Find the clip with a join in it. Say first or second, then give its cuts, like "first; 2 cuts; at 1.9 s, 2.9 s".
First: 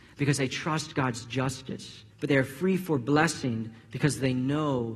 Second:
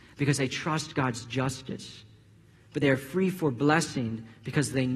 first; 1 cut; at 2.1 s